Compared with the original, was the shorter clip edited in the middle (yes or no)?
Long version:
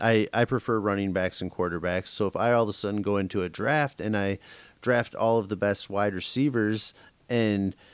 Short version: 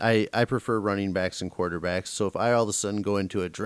no